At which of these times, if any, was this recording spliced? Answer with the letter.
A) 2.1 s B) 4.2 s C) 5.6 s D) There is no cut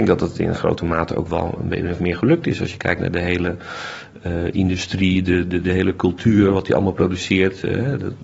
C